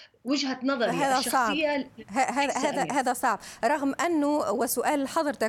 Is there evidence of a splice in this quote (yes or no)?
no